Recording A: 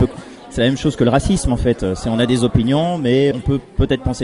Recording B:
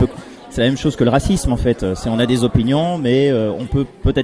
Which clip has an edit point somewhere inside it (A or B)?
A